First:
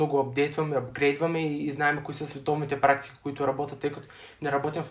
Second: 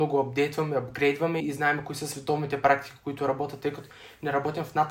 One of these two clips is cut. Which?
second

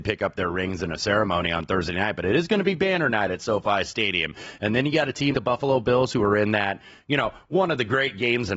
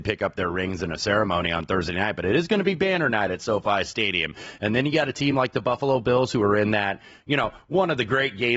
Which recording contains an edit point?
first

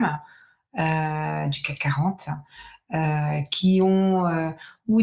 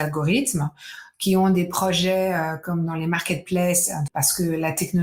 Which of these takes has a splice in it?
second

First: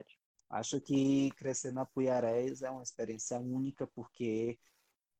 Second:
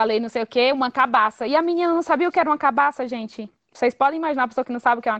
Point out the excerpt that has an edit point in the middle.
first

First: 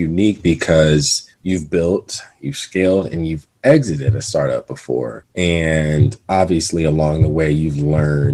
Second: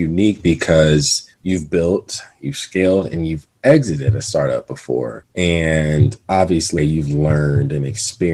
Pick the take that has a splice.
second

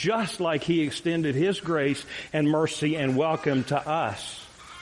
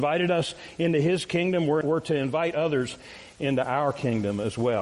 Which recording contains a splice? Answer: second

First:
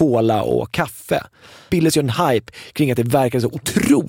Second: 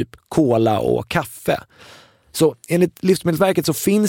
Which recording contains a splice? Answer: first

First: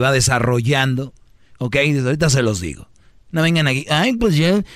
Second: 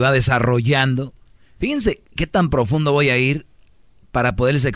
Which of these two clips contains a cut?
first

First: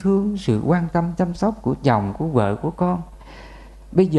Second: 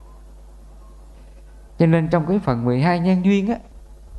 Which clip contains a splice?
second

